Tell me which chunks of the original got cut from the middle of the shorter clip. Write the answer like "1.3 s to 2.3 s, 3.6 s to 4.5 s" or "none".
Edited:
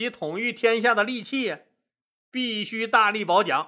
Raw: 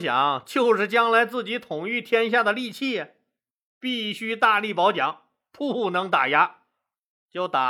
none